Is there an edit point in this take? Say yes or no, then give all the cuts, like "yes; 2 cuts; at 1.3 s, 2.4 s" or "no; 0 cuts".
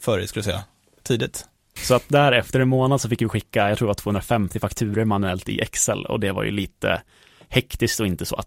yes; 1 cut; at 1.8 s